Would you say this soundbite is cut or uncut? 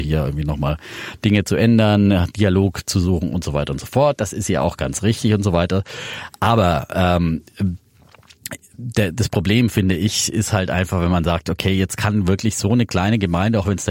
uncut